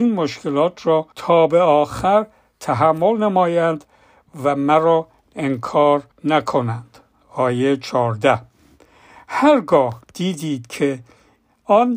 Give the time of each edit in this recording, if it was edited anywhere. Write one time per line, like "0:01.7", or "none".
0:01.1
0:06.1
0:10.0